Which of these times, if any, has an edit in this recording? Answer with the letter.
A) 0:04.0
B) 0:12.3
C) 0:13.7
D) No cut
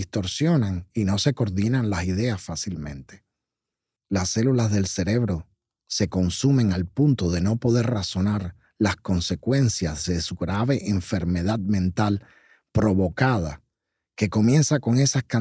A